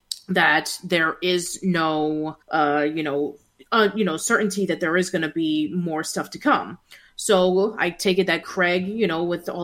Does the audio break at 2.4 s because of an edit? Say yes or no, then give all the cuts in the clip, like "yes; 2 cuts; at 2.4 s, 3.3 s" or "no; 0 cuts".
yes; 1 cut; at 2.4 s